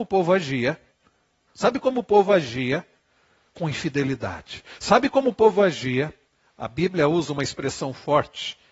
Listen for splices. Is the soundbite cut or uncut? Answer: cut